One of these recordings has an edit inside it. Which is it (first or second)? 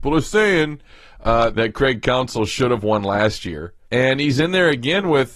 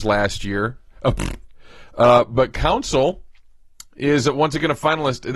first